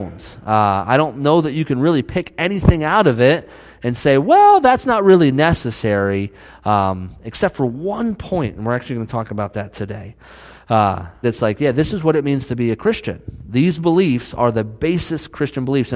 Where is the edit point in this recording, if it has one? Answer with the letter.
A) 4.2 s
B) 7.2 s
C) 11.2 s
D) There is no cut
C